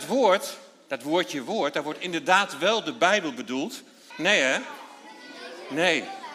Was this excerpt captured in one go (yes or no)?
no